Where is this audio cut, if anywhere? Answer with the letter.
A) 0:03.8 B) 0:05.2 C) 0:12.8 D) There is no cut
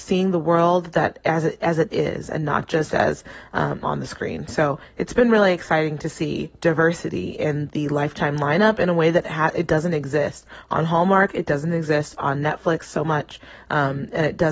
A